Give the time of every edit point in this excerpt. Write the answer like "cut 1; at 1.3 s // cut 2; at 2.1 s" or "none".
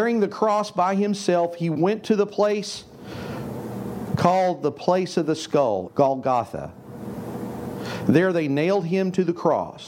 cut 1; at 5.9 s